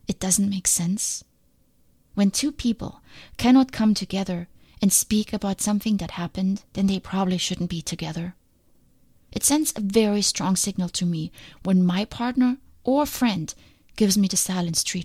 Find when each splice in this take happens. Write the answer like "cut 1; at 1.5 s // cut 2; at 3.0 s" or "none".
cut 1; at 6.7 s